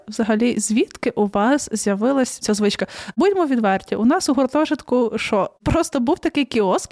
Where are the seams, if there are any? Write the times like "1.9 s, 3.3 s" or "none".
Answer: 2.4 s